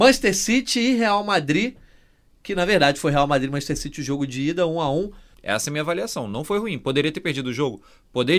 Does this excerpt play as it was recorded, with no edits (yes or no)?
no